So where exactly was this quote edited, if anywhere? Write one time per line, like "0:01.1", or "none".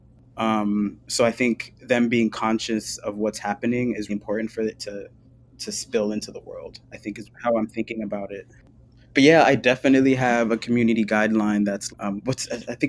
0:04.1
0:11.9